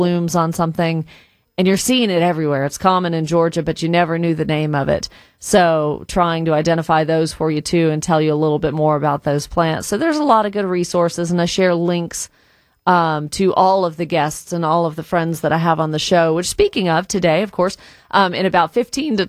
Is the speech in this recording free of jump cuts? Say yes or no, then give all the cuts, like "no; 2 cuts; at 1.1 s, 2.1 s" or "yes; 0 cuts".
yes; 0 cuts